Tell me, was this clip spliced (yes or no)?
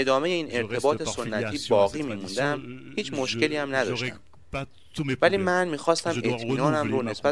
no